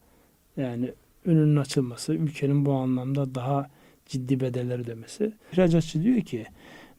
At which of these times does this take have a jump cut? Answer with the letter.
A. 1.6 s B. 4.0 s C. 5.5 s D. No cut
C